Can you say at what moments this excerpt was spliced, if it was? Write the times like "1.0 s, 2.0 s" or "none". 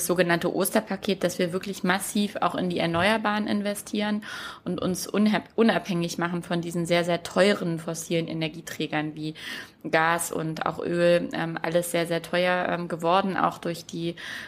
none